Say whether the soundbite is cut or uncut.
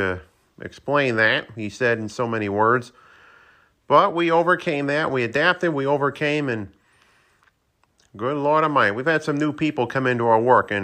uncut